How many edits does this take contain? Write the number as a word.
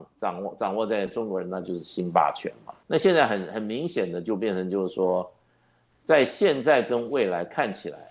one